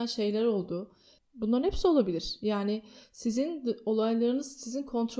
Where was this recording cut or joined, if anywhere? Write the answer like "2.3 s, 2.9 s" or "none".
1.2 s

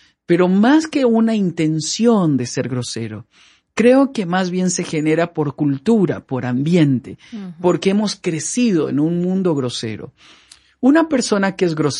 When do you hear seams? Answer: none

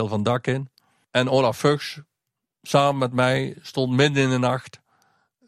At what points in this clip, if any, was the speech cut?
none

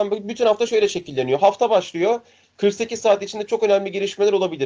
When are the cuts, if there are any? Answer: none

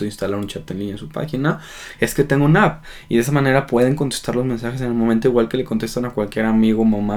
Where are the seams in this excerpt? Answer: none

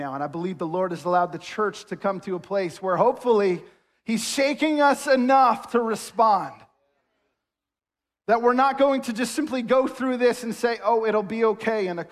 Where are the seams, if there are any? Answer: none

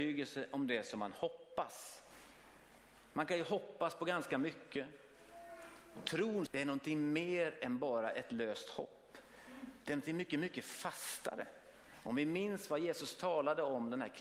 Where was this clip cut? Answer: 6.5 s

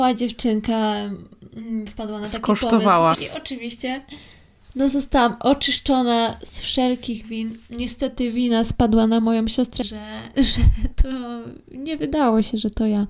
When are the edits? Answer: 3.1 s, 9.8 s

